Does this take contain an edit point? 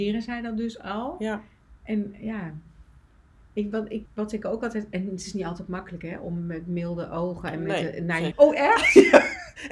yes; 2 cuts; at 4.1 s, 8.3 s

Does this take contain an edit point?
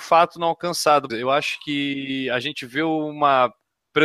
yes; 1 cut; at 1.1 s

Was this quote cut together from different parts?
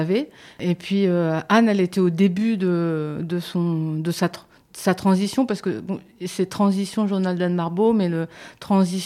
no; 0 cuts

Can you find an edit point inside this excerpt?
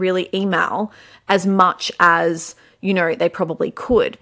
no; 0 cuts

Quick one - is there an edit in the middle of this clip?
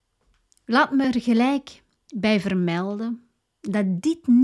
no; 0 cuts

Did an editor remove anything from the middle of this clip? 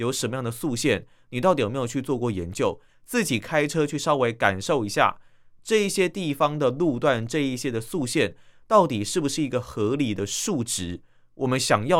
yes; 1 cut; at 2.9 s

